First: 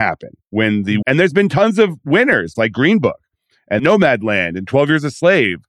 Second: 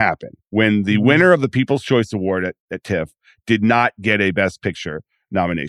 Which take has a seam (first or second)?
first